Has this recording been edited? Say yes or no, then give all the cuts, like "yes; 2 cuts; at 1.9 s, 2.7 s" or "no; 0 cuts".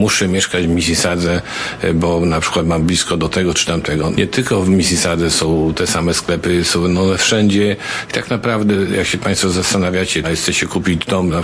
yes; 3 cuts; at 4.1 s, 8.1 s, 10.2 s